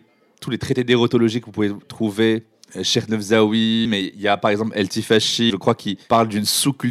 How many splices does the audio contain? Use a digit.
2